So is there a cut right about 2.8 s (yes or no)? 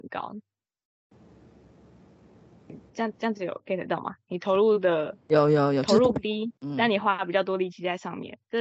no